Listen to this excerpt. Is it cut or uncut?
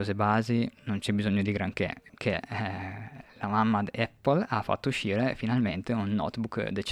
cut